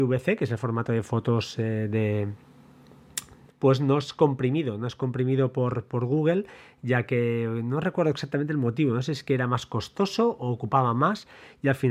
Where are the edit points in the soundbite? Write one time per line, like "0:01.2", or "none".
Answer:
0:03.5